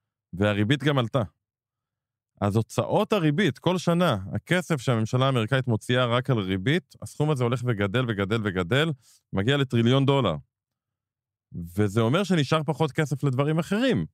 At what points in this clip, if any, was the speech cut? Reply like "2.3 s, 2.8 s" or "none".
none